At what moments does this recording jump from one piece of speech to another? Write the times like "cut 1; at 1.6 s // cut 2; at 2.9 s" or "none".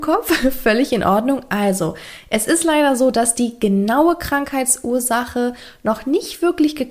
none